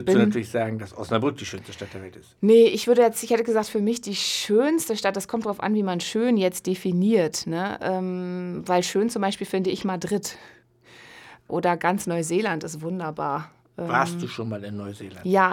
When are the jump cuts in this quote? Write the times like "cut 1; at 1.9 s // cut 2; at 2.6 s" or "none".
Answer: none